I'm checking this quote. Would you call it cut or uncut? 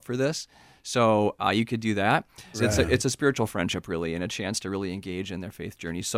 cut